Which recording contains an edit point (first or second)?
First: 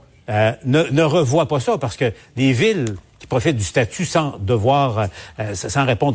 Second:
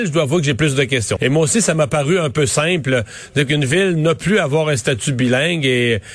second